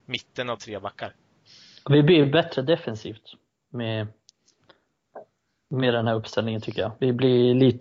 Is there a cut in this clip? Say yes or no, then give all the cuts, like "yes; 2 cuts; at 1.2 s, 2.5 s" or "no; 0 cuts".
no; 0 cuts